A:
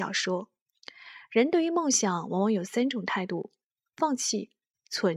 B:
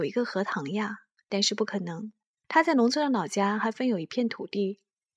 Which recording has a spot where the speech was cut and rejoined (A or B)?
B